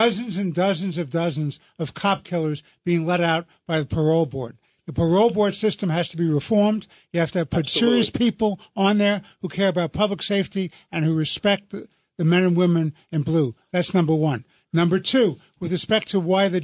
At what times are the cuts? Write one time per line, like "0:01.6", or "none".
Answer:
none